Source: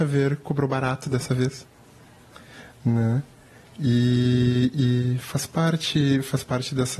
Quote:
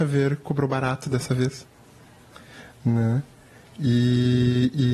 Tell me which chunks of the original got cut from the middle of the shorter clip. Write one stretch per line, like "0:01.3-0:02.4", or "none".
none